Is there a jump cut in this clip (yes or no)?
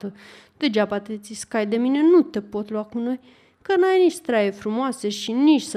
no